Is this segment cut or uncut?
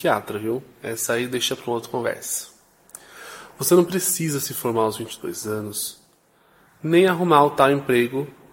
uncut